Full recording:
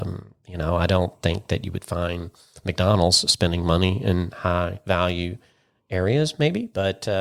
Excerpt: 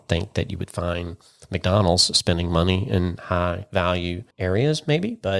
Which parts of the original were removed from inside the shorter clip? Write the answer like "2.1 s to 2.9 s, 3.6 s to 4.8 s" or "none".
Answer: 5.4 s to 5.8 s